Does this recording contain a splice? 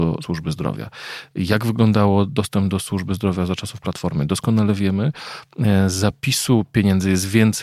no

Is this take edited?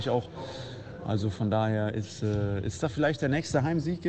no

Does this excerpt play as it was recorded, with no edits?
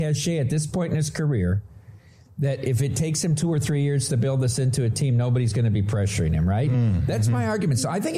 yes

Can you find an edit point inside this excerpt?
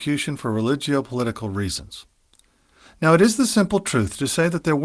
no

